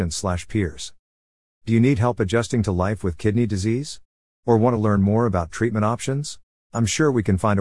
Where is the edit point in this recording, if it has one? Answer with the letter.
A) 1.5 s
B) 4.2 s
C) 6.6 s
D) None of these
C